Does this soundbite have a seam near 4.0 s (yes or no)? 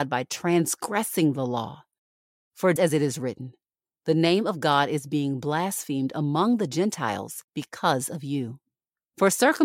no